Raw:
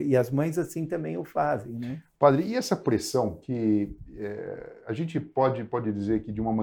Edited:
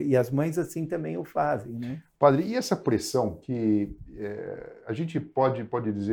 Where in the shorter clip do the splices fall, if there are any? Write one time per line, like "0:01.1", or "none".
none